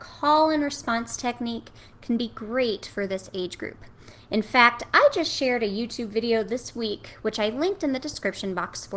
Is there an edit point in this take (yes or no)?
no